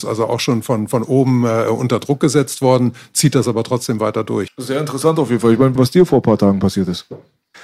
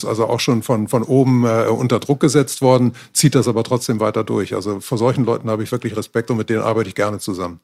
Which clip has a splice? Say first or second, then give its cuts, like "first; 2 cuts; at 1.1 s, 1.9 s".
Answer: first; 2 cuts; at 4.5 s, 5.8 s